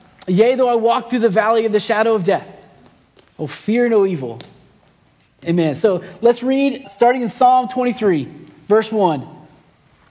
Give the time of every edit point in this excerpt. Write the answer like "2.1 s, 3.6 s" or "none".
5.4 s, 6.8 s